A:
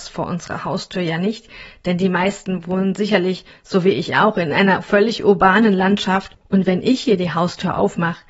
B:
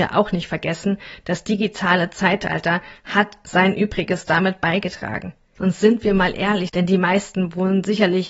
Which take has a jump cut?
B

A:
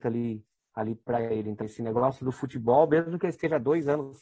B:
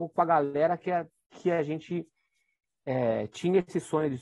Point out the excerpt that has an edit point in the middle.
A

